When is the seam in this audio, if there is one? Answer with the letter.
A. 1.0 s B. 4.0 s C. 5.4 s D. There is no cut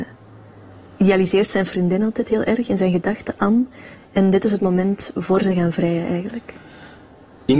D